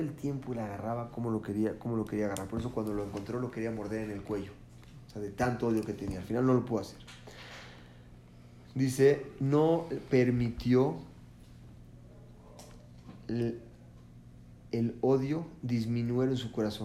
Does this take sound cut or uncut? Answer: uncut